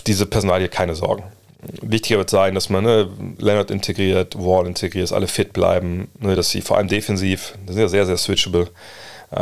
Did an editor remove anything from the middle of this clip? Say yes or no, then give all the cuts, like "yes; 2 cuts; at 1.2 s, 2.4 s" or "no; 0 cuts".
no; 0 cuts